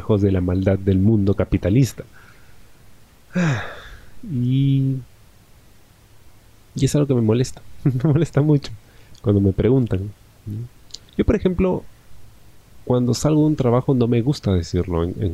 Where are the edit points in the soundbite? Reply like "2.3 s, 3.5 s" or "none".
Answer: none